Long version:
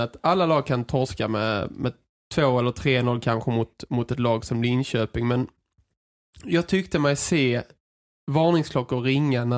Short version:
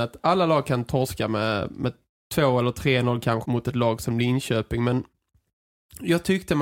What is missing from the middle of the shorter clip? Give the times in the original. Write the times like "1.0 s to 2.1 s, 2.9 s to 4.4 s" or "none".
3.4 s to 3.9 s